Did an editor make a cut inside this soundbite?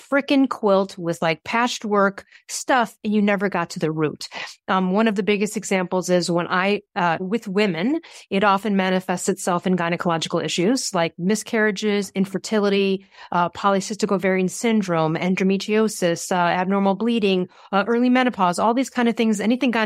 yes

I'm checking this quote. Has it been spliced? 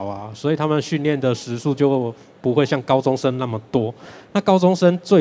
no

